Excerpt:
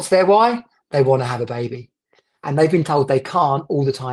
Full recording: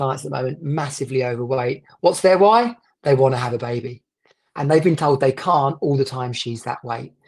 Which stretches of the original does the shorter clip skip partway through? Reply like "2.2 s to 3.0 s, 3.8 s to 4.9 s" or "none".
none